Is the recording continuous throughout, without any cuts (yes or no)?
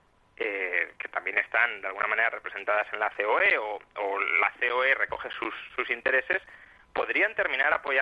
yes